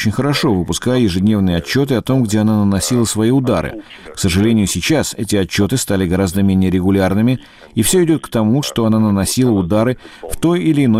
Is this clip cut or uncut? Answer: cut